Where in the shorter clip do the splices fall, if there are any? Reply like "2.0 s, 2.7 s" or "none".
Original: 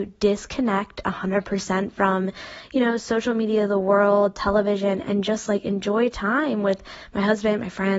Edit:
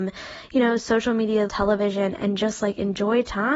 1.5 s

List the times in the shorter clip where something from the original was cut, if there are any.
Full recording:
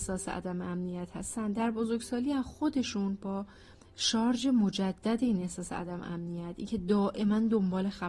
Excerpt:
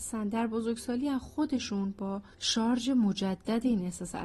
2.3 s

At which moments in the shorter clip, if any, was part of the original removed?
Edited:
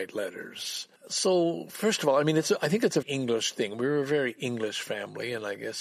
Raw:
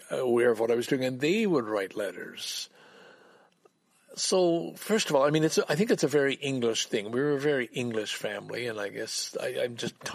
1.0 s, 3.0 s

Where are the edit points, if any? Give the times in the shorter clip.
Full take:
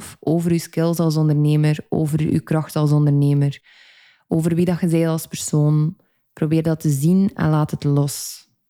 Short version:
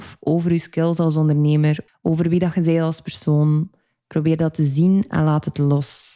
1.9 s

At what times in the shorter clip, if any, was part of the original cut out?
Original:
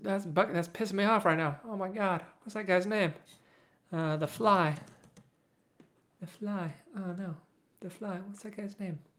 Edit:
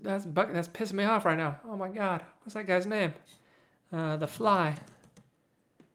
none

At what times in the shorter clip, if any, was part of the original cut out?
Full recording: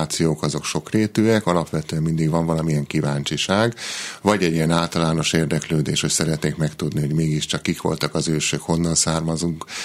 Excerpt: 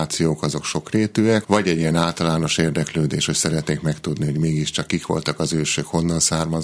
1.4 s

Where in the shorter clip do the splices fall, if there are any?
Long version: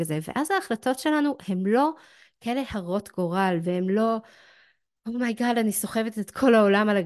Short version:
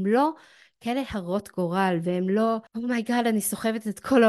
2.7 s

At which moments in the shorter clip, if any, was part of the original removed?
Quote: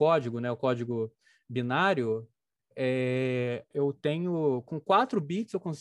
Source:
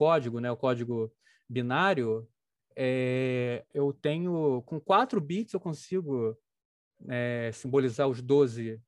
none

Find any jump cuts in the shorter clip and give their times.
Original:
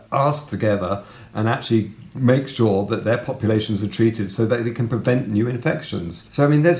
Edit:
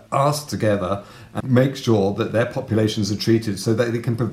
1.4 s

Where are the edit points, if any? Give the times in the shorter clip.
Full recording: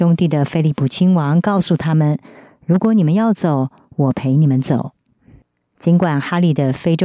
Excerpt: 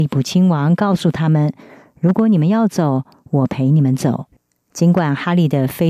4.3 s

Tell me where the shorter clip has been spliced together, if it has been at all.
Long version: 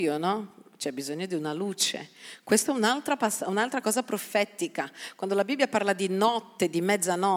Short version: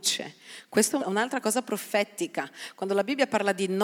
1.0 s

